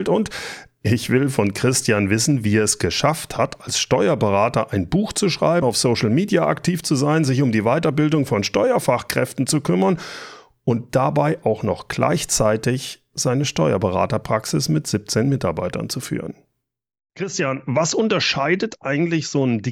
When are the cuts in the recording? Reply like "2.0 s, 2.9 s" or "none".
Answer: 5.6 s, 17.1 s